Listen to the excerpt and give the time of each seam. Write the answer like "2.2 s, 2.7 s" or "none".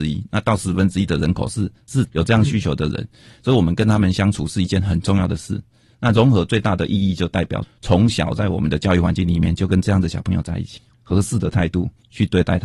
10.9 s